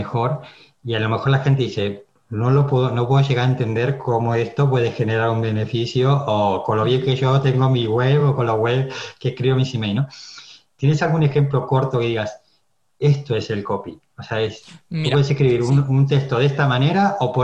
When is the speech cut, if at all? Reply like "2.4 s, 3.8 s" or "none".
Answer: none